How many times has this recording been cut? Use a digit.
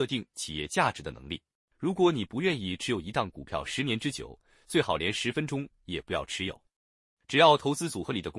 1